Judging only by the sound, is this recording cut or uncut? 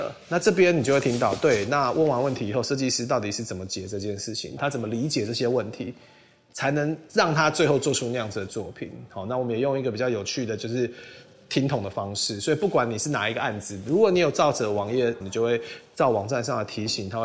cut